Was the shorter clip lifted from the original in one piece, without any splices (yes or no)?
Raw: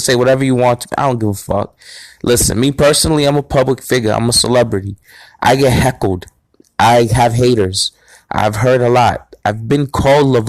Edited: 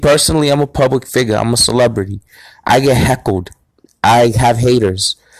yes